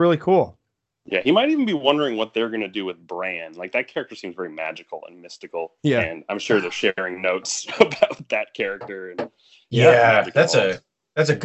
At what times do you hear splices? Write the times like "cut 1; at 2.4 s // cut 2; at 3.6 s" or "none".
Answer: cut 1; at 5.8 s